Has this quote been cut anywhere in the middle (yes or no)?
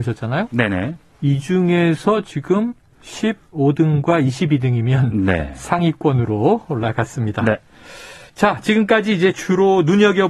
no